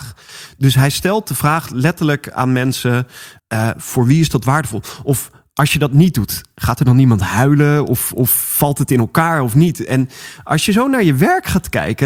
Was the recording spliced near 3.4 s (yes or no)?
yes